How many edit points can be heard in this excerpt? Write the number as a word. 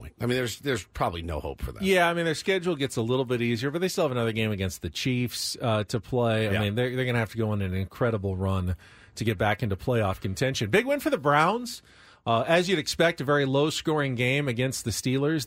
zero